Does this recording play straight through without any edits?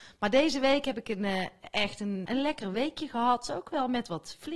no; 1 cut; at 2.3 s

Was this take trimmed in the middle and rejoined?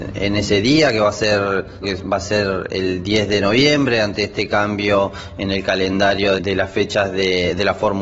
yes; 2 cuts; at 1.8 s, 6.4 s

